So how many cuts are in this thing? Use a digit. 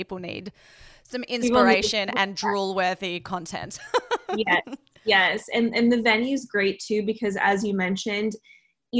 0